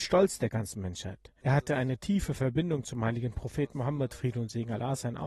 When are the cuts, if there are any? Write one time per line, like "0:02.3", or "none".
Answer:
0:01.4